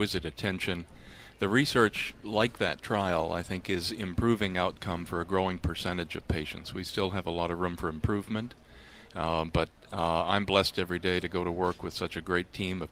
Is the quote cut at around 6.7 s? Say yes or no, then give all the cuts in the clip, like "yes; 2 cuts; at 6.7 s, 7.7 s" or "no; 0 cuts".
no; 1 cut; at 1.3 s